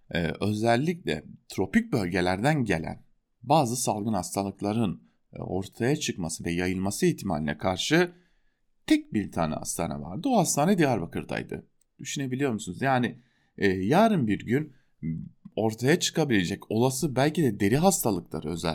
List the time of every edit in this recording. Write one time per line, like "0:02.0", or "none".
0:11.8